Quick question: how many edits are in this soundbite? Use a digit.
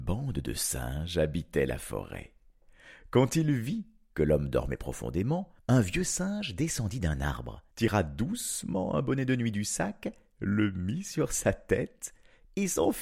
2